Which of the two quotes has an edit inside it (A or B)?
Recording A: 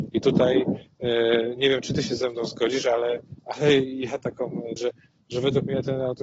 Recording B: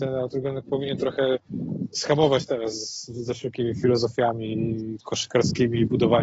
A